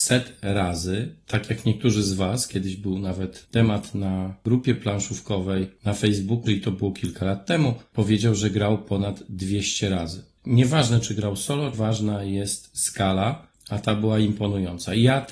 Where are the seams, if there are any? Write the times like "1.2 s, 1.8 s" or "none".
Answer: 6.5 s, 11.7 s